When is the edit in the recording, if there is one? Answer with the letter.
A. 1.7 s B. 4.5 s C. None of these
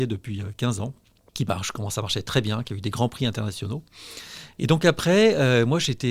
B